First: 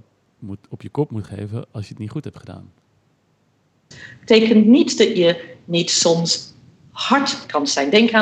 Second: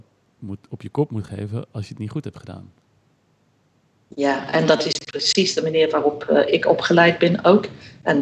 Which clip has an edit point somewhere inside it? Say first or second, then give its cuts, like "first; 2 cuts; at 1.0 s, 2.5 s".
first; 1 cut; at 3.9 s